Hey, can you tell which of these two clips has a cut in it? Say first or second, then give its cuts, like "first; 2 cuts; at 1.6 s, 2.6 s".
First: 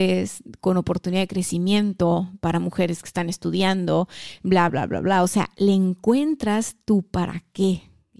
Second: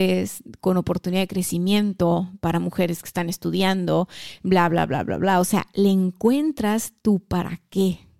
first; 1 cut; at 4.7 s